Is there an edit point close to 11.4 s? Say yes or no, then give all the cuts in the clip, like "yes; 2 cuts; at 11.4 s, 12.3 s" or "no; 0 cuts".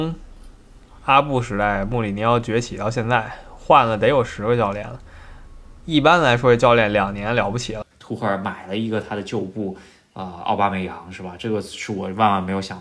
no; 1 cut; at 7.9 s